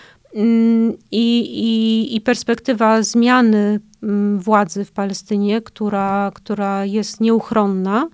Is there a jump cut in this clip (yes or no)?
no